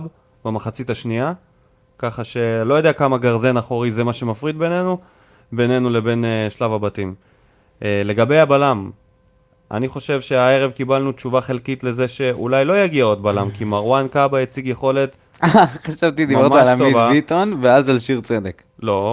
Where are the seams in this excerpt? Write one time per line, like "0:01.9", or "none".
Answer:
none